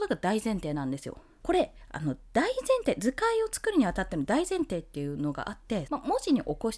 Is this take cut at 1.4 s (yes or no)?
yes